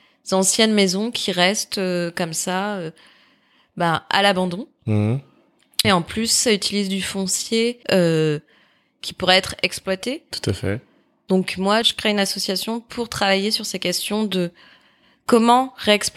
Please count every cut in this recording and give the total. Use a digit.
3